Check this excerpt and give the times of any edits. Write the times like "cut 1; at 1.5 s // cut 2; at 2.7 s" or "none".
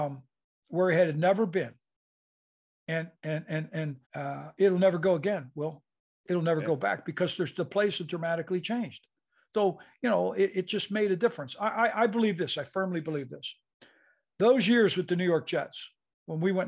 cut 1; at 4.0 s